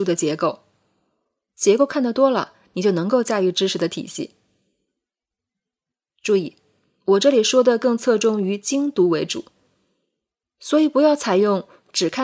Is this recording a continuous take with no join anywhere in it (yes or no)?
no